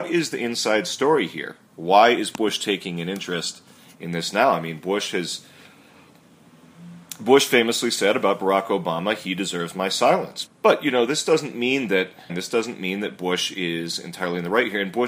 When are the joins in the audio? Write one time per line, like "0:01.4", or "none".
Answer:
0:10.5
0:12.3